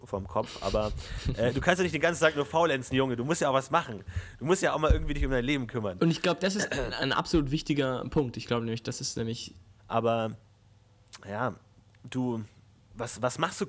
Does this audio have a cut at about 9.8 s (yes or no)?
yes